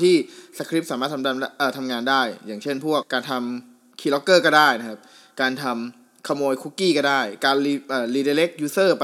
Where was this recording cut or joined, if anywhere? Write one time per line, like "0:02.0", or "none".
0:03.0